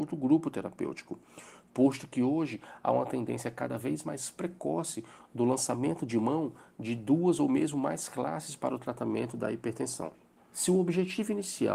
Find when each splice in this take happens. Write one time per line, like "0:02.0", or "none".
0:10.4

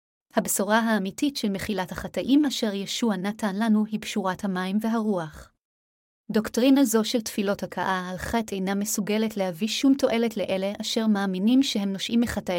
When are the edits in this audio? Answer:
0:06.2

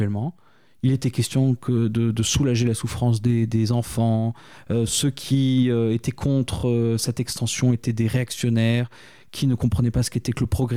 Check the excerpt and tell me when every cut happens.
none

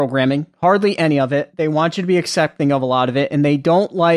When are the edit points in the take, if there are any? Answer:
none

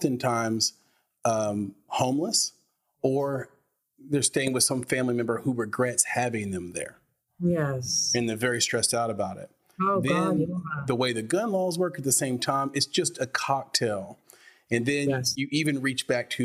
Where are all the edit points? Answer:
none

